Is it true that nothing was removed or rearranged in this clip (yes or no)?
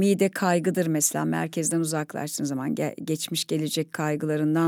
yes